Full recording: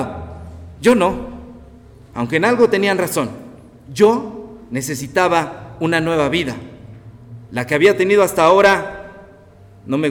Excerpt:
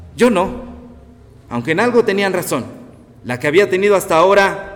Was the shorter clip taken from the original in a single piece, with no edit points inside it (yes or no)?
no